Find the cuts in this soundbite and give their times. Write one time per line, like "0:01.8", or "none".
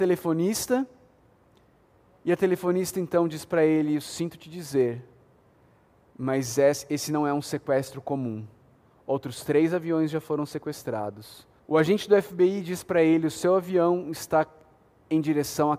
0:11.6